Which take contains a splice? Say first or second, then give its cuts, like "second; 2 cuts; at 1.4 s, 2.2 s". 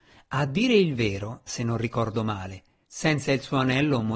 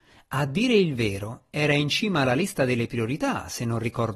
first; 2 cuts; at 1.5 s, 2.8 s